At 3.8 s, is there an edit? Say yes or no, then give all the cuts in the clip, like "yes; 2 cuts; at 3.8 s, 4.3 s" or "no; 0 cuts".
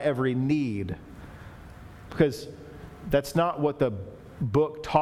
no; 1 cut; at 2.1 s